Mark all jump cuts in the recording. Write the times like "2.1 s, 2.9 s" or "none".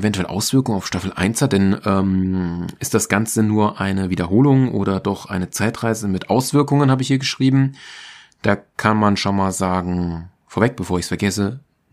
none